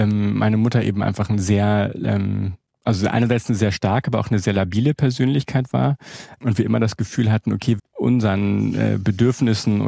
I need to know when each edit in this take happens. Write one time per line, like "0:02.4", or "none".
0:07.8